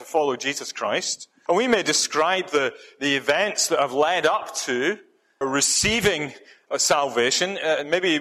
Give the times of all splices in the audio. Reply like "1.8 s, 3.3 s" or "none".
1.5 s, 5.4 s